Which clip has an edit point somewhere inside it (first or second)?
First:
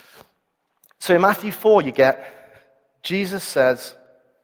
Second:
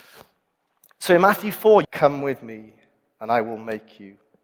second